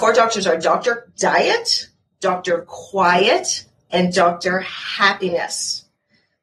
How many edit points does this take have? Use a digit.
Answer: 1